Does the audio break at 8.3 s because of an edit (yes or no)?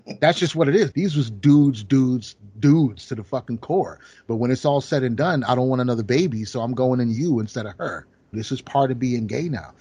yes